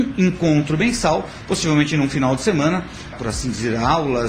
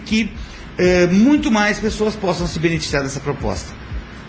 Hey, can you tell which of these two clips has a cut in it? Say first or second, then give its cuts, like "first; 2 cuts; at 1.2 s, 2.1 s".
first; 1 cut; at 3.1 s